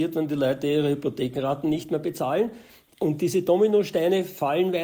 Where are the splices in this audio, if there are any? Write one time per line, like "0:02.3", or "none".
0:02.9